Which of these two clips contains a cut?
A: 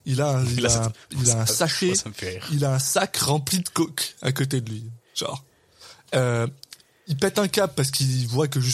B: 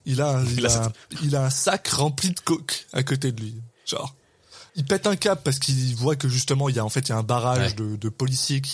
B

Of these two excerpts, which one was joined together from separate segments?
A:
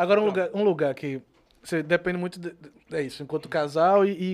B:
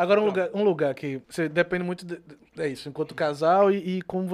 B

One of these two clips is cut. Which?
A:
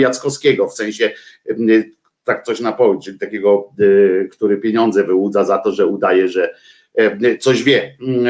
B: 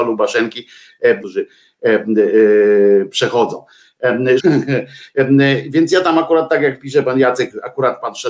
B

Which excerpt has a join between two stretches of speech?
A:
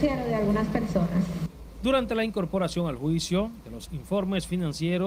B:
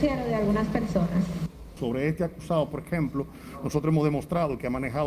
B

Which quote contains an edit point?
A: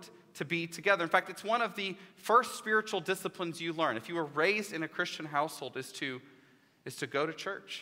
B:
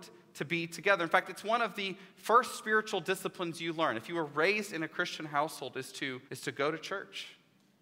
B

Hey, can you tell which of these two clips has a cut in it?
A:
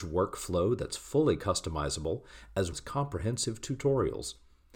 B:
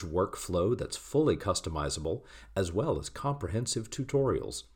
A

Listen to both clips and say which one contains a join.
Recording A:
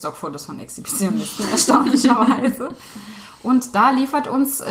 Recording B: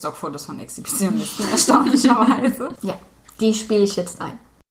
B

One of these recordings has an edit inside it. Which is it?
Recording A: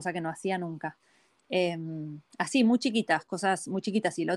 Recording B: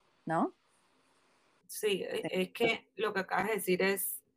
B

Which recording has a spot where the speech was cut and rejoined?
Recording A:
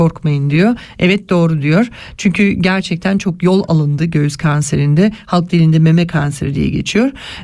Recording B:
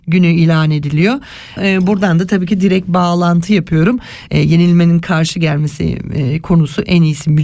B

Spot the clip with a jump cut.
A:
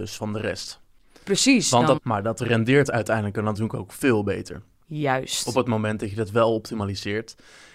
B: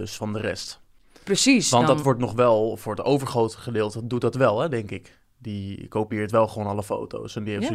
A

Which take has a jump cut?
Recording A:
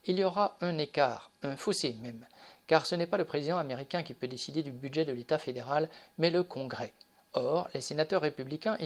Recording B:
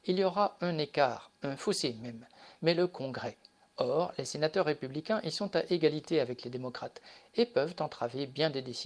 B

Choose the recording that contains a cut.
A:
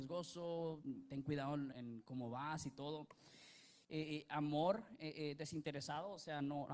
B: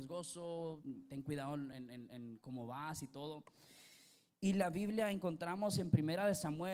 A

